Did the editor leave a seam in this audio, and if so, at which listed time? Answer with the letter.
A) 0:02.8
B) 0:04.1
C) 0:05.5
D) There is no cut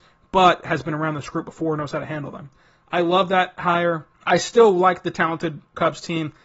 B